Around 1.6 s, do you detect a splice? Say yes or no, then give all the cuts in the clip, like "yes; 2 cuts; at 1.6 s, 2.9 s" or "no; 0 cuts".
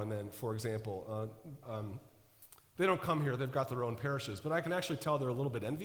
yes; 1 cut; at 1.6 s